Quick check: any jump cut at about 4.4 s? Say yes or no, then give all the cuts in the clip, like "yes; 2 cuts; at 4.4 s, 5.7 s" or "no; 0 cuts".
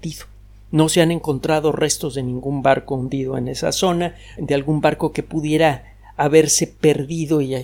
yes; 1 cut; at 4.4 s